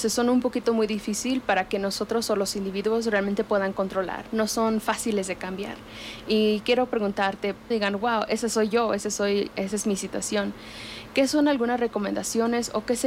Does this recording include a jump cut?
yes; 1 cut; at 7.7 s

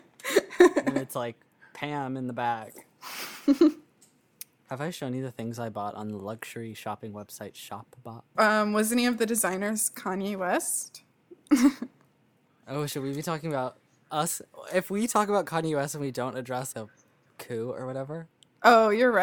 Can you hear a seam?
yes; 2 cuts; at 8.3 s, 16.7 s

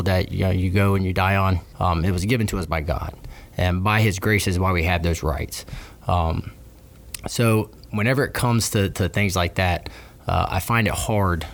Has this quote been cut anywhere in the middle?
yes; 1 cut; at 1.7 s

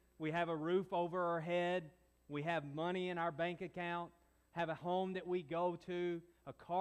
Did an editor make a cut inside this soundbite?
no; 0 cuts

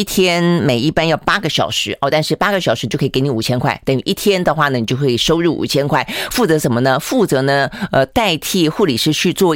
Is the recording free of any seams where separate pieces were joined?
yes; 0 cuts

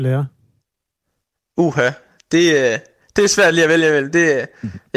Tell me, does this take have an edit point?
no; 0 cuts

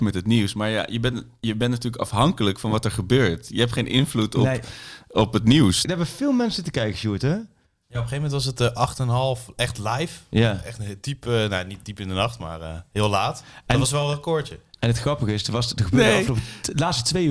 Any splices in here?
yes; 1 cut; at 5.8 s

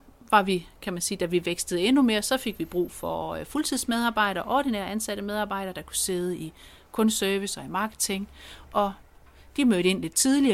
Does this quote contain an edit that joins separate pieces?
no; 0 cuts

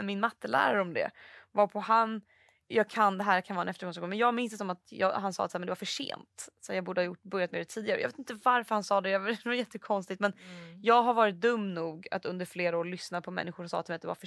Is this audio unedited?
yes; 0 cuts

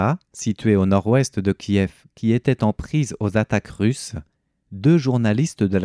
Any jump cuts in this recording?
no; 0 cuts

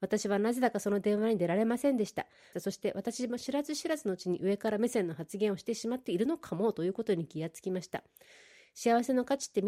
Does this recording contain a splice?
yes; 1 cut; at 2.5 s

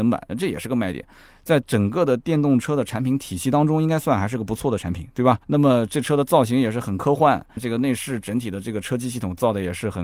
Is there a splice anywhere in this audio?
yes; 2 cuts; at 5.4 s, 7.6 s

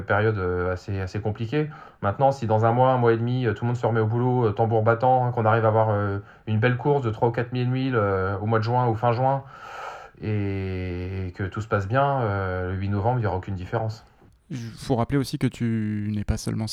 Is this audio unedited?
yes; 0 cuts

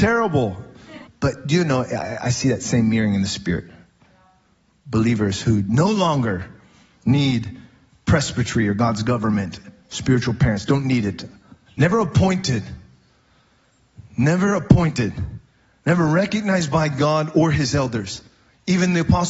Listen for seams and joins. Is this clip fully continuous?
no; 2 cuts; at 1.0 s, 11.7 s

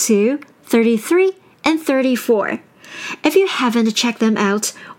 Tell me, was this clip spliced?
no; 0 cuts

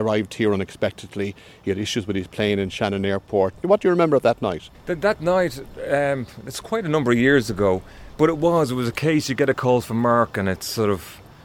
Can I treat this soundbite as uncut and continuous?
yes; 0 cuts

